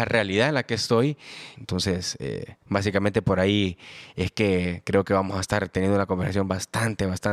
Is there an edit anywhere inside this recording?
yes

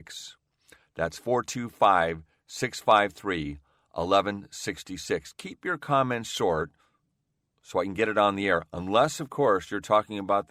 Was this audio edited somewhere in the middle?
no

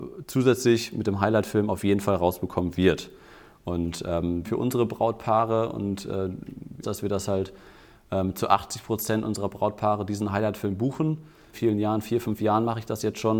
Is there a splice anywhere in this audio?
yes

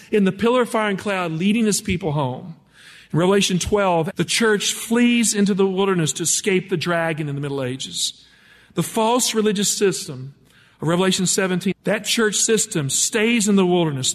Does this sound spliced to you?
yes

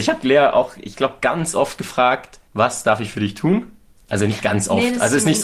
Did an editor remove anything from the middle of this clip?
yes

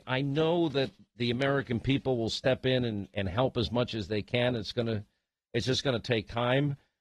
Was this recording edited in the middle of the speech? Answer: no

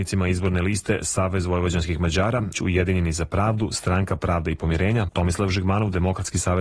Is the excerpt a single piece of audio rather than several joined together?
no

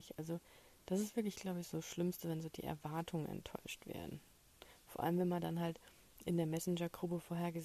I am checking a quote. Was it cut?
no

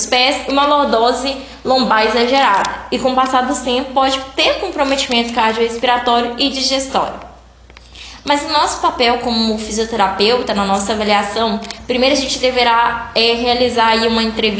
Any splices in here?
yes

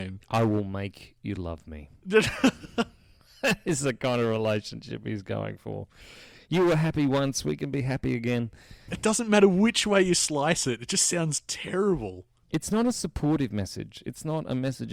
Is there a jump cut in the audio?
yes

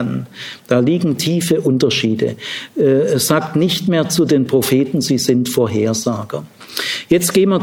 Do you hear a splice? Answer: no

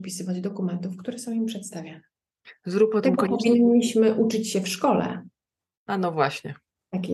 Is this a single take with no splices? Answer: yes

